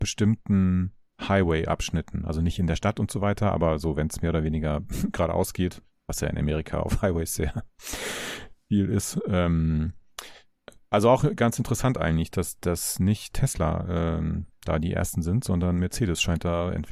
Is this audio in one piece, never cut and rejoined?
yes; 0 cuts

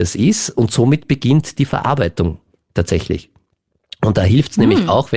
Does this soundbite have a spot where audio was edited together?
no; 0 cuts

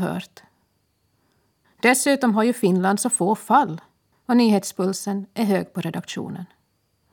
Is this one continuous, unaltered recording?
no; 2 cuts; at 1.6 s, 4.1 s

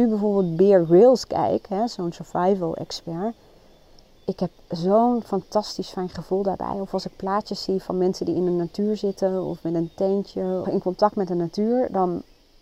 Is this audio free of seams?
no; 1 cut; at 10.6 s

